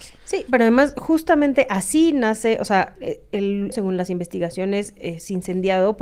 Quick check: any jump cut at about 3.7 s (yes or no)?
yes